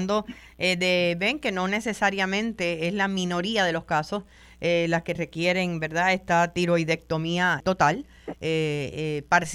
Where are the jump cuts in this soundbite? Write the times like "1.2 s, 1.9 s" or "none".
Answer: 7.6 s